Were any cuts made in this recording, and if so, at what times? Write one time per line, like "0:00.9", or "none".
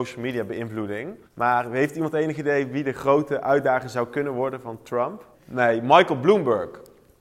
0:01.2
0:05.3